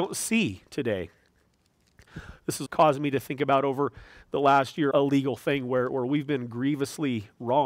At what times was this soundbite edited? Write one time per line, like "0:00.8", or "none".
0:02.7
0:04.9